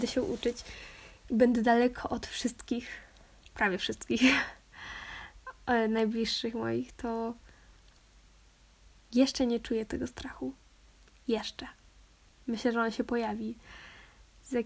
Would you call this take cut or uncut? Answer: uncut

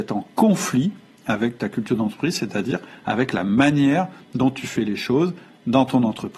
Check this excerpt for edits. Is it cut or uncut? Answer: uncut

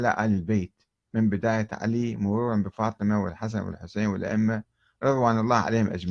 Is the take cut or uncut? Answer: uncut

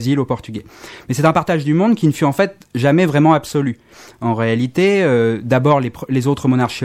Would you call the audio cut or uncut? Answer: uncut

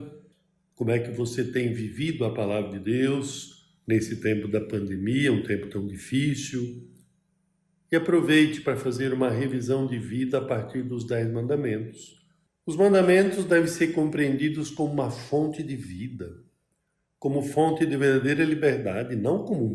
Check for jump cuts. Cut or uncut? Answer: cut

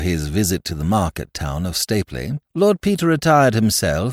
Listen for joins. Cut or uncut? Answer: cut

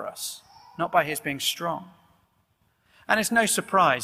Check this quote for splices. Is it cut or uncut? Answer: uncut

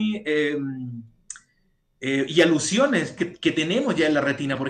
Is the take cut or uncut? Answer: cut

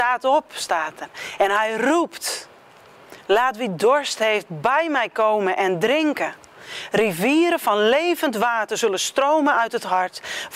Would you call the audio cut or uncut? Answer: uncut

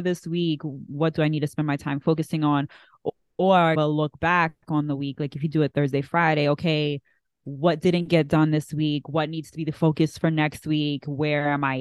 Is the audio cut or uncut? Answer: uncut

